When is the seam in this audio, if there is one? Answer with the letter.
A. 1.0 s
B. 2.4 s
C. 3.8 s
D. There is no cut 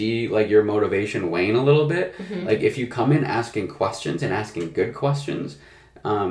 D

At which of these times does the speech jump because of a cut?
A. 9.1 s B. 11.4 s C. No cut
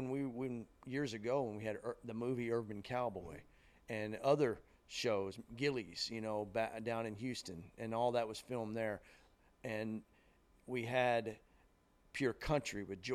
C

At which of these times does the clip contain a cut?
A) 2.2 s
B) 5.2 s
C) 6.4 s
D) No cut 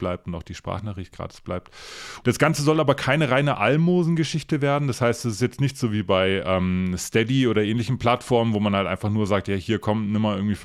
A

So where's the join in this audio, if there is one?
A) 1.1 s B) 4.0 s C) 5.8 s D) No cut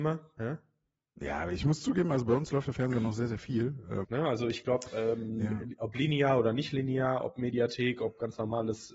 B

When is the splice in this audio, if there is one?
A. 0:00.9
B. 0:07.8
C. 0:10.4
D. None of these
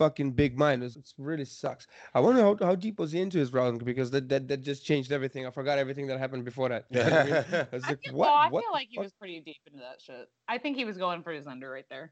A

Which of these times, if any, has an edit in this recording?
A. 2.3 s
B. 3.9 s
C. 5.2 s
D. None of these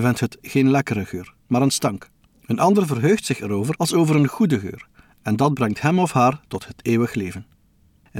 A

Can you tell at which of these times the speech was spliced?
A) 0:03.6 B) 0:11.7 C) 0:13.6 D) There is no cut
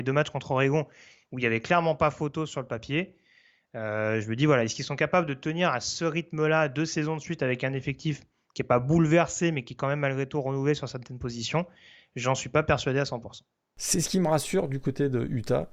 D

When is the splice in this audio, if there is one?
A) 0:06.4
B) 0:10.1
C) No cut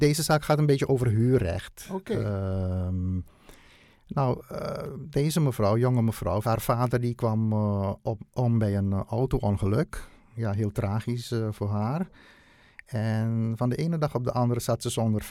A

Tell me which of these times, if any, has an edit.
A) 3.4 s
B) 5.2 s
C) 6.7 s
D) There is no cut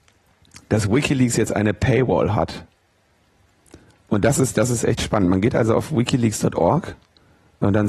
D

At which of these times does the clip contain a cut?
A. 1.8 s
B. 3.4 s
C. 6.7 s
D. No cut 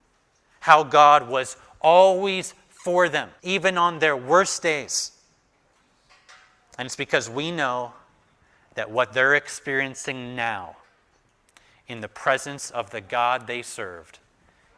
B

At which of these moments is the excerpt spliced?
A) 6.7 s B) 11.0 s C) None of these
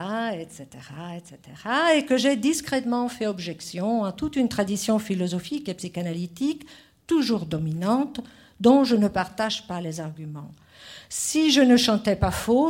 C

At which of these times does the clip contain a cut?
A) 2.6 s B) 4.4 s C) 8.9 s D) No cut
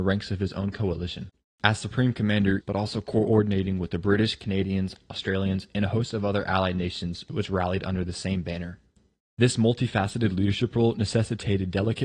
A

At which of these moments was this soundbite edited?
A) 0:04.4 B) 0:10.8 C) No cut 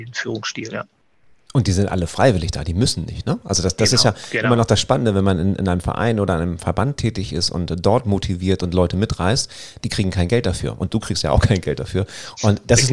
C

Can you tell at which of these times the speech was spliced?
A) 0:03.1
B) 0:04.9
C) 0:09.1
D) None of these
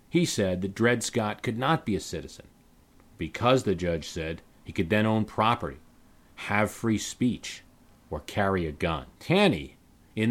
C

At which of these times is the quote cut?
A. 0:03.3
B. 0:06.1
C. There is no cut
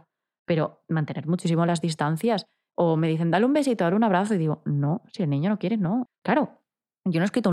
B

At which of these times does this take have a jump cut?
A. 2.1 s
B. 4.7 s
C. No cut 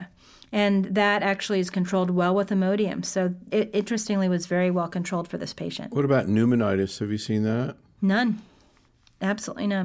C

